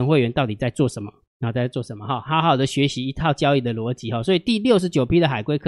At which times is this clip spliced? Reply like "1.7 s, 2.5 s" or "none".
2.3 s